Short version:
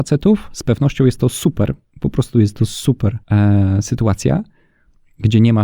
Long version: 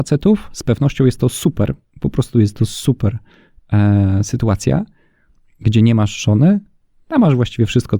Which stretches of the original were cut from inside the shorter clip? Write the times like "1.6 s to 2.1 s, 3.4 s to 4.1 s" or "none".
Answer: 3.2 s to 3.6 s